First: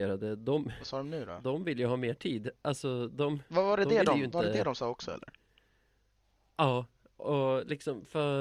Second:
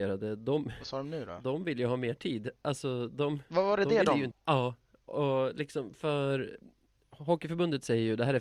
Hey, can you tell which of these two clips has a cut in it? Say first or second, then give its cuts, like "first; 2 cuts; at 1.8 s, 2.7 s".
second; 1 cut; at 4.3 s